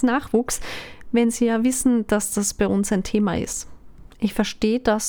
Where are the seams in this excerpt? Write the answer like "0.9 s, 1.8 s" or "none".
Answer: 4.1 s

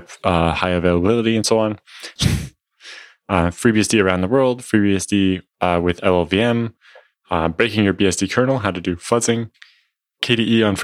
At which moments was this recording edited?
2.2 s

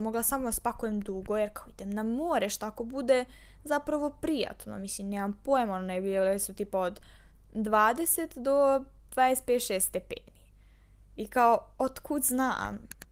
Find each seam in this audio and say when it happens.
none

